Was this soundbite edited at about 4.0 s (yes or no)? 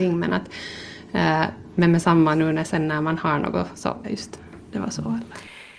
yes